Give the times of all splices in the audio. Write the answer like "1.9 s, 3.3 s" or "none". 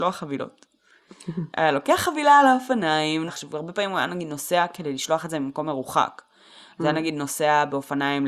3.3 s